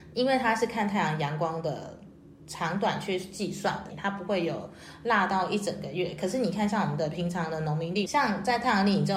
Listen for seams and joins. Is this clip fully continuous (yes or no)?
no